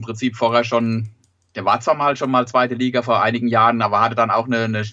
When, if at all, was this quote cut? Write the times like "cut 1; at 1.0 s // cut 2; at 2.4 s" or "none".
none